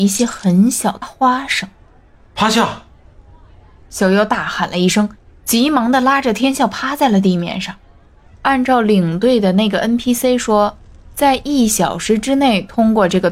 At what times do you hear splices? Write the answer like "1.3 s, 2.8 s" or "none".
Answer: 1.0 s, 8.3 s